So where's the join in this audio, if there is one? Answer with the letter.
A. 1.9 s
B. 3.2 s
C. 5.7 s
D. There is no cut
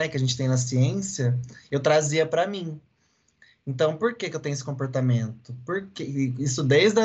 D